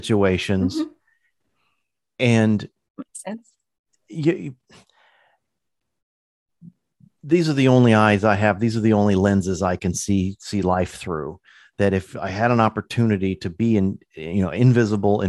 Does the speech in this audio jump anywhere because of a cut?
no; 0 cuts

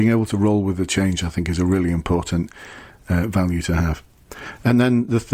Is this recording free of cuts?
yes; 0 cuts

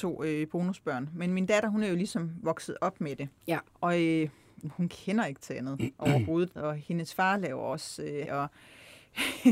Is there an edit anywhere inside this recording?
yes; 3 cuts; at 3.7 s, 6.6 s, 8.3 s

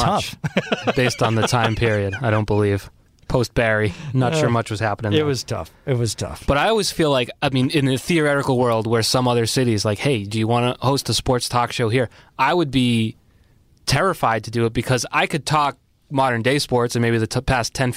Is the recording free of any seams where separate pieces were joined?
yes; 0 cuts

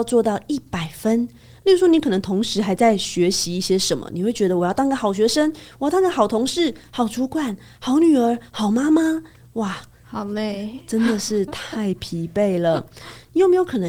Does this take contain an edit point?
no; 0 cuts

